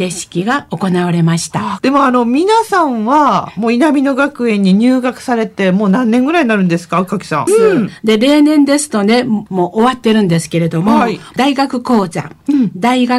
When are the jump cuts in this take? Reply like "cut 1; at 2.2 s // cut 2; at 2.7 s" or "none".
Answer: cut 1; at 1.8 s // cut 2; at 7.5 s